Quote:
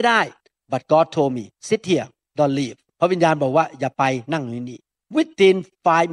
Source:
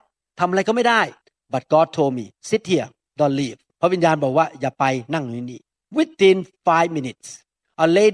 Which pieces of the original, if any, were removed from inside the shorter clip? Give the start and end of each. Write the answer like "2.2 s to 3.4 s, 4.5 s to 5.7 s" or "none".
none

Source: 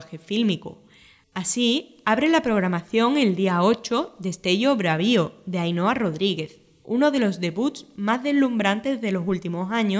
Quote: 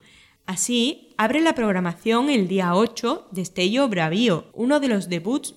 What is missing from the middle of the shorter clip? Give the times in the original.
5.4 s to 6.8 s

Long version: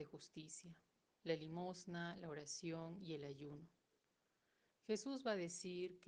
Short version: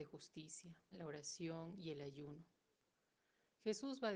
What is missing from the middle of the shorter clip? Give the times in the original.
0.9 s to 2.1 s

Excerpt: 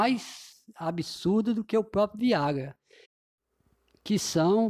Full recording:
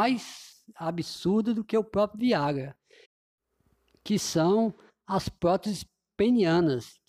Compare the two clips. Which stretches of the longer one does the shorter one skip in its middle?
none

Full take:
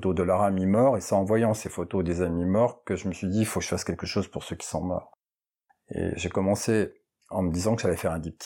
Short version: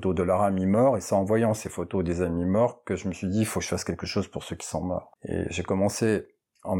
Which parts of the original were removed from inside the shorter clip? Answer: 5.2 s to 5.8 s

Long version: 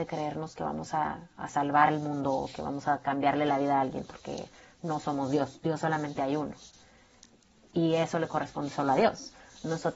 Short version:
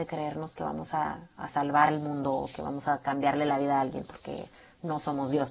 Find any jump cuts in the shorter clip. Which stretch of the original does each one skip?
none

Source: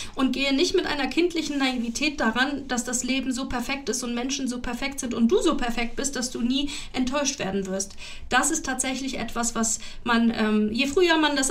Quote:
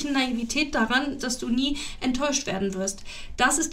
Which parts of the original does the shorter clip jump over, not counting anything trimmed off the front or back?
2.6 s to 6.1 s

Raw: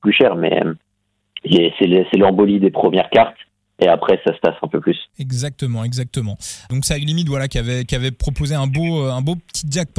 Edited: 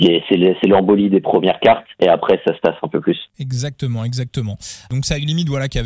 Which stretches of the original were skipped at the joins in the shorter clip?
3.4 s to 3.7 s

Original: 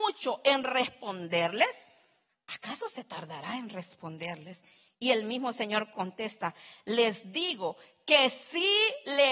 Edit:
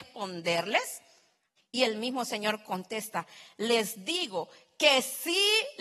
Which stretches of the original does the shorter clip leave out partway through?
2.4 s to 4.8 s

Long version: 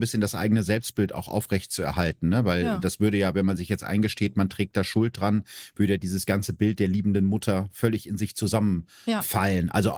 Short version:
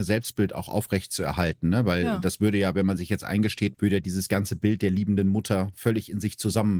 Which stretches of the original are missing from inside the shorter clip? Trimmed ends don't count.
4.3 s to 5.7 s

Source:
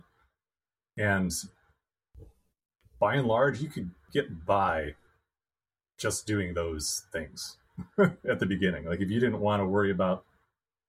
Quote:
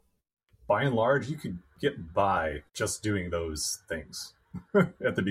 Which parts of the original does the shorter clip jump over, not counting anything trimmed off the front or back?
5.0 s to 5.9 s

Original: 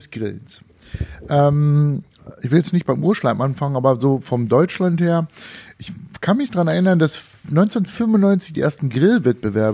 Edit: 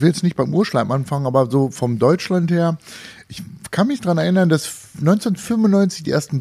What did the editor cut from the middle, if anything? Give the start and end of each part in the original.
none

